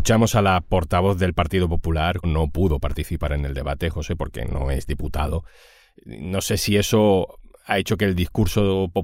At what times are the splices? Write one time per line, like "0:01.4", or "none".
0:02.2